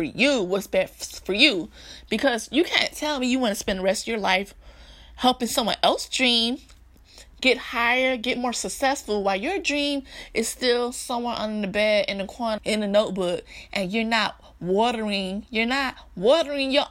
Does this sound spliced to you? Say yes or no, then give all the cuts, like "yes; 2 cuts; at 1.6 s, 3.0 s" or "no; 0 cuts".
yes; 1 cut; at 12.6 s